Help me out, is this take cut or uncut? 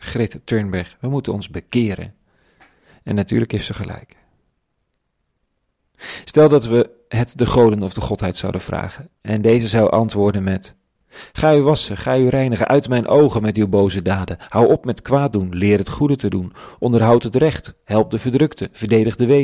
uncut